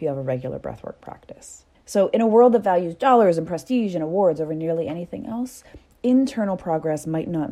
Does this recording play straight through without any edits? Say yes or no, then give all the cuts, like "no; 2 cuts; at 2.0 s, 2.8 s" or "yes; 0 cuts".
no; 1 cut; at 1.7 s